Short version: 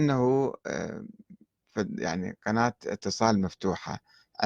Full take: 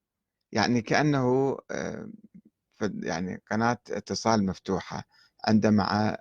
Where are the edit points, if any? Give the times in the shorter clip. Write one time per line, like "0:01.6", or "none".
none